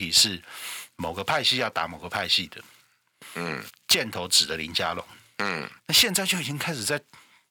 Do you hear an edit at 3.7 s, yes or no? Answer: yes